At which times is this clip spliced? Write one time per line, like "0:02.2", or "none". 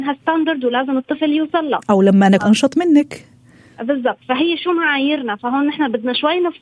0:02.4